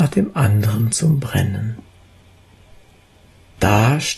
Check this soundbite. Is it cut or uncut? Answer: uncut